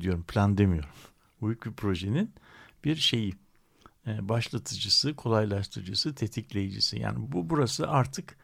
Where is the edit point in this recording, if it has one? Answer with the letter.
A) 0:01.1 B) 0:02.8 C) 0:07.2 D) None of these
C